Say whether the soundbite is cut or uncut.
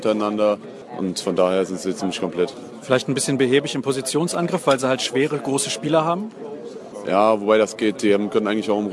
uncut